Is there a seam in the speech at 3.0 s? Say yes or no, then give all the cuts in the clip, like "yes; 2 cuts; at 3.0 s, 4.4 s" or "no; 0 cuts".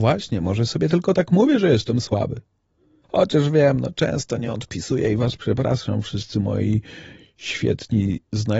yes; 1 cut; at 3.0 s